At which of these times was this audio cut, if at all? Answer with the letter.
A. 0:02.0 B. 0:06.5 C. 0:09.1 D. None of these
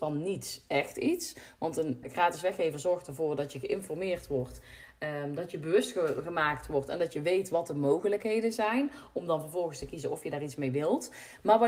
A